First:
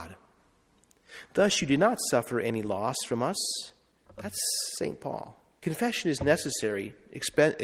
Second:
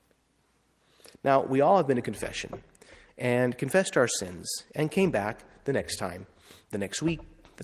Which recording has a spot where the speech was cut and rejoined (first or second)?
first